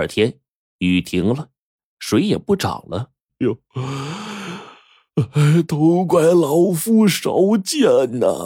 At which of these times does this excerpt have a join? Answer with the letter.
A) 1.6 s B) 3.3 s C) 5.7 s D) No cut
B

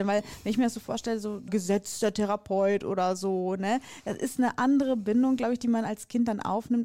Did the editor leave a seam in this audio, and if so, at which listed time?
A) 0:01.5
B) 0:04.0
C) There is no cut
A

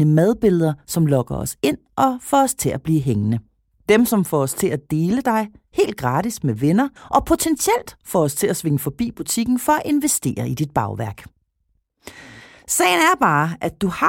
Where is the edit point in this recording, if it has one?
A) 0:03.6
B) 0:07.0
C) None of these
B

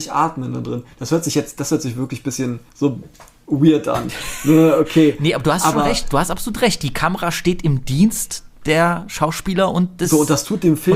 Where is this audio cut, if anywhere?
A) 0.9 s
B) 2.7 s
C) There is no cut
B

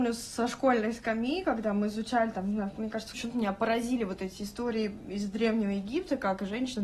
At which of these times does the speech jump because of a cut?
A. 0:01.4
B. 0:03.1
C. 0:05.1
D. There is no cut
B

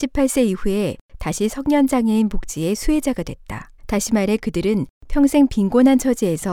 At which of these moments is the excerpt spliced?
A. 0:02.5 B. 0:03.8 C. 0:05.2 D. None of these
B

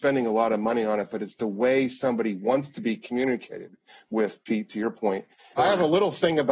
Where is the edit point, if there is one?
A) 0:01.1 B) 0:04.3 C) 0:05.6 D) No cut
C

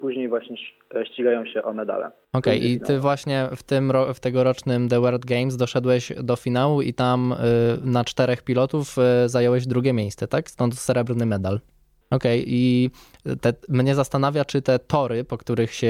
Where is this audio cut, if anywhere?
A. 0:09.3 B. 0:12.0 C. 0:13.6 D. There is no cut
B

